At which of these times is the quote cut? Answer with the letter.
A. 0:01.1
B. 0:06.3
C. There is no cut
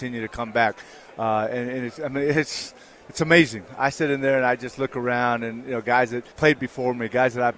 B